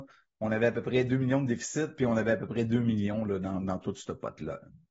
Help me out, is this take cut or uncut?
uncut